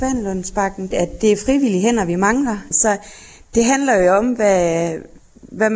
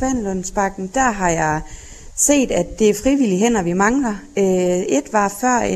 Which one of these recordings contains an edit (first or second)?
first